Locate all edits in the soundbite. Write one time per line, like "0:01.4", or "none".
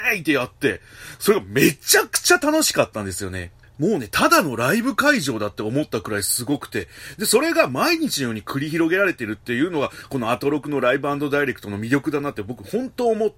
none